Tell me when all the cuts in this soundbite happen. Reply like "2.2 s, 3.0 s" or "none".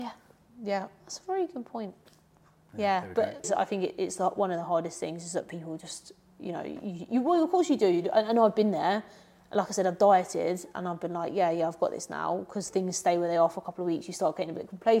3.4 s